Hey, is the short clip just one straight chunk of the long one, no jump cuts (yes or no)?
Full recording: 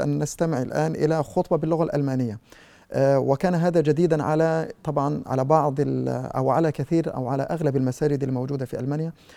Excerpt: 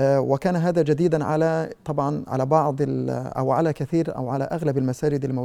yes